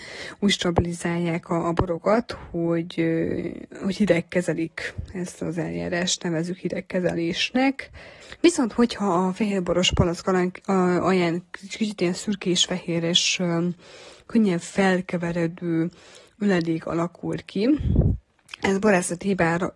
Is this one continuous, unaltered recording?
yes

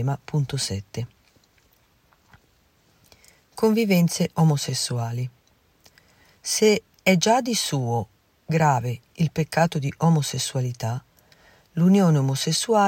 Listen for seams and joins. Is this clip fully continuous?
yes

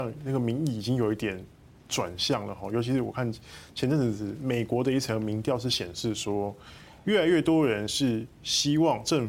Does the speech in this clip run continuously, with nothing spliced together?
yes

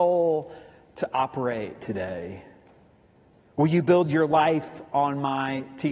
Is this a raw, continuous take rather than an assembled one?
yes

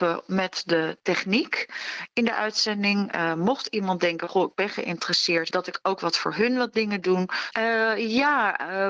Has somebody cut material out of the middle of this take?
yes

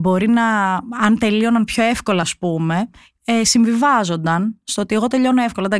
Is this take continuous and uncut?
yes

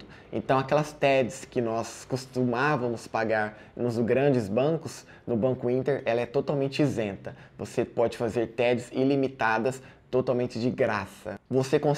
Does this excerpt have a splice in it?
no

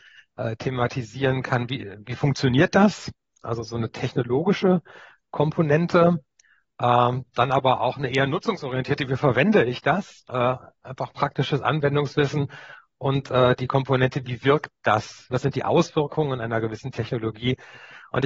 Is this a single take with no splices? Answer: no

